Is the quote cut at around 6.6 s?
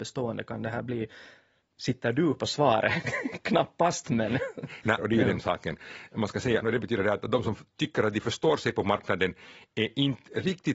yes; 2 cuts; at 5.0 s, 6.6 s

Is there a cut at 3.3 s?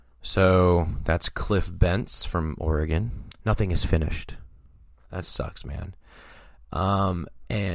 yes; 2 cuts; at 3.3 s, 5.0 s

